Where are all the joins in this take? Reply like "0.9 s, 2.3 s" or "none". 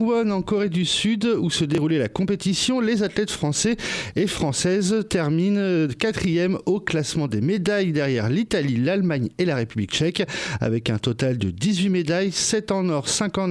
none